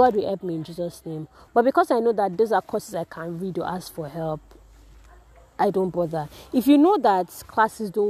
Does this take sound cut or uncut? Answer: uncut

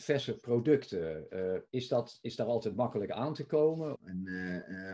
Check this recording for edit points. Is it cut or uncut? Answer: cut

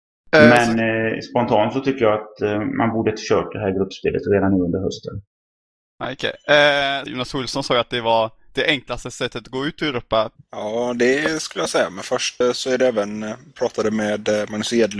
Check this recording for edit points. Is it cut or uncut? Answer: cut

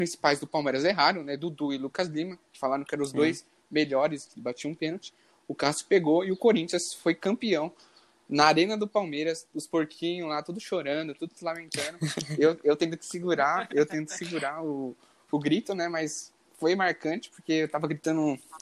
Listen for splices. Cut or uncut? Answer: uncut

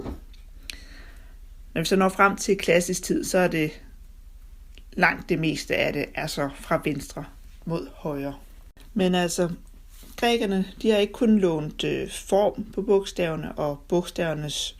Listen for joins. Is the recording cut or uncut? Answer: uncut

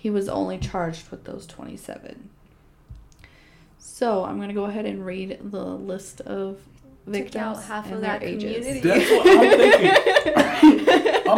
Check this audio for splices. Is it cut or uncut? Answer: uncut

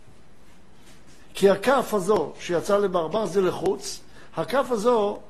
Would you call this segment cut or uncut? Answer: uncut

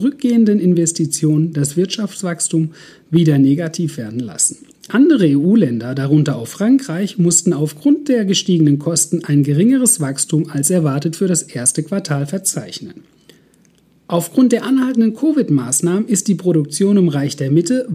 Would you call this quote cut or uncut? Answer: uncut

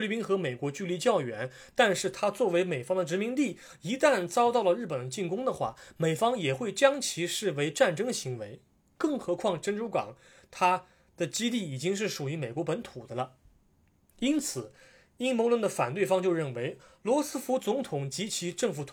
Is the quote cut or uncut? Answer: uncut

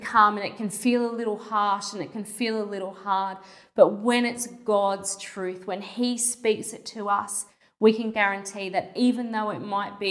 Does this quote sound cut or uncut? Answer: uncut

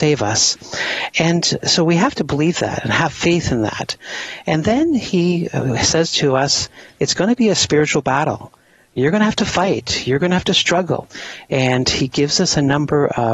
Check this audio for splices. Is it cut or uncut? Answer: uncut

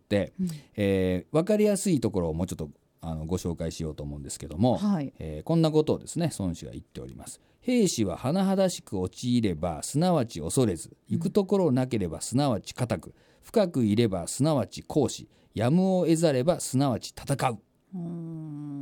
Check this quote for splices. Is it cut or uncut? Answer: uncut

